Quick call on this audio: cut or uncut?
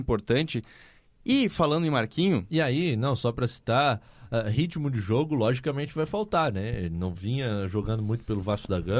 uncut